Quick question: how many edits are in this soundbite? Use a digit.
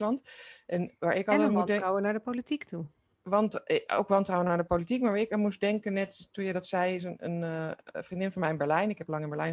0